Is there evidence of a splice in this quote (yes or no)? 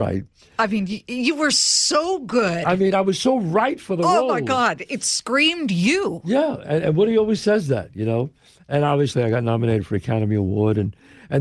no